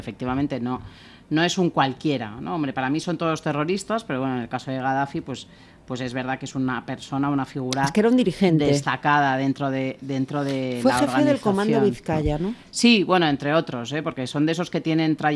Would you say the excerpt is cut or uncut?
uncut